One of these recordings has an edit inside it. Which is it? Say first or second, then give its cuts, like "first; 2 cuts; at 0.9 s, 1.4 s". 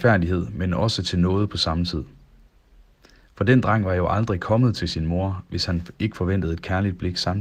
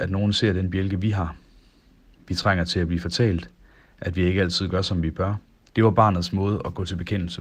second; 1 cut; at 5.7 s